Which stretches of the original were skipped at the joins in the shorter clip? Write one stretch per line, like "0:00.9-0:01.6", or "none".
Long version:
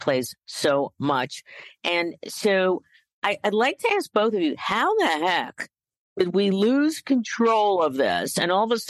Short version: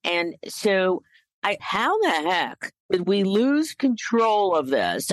0:03.4-0:04.6
0:05.8-0:06.1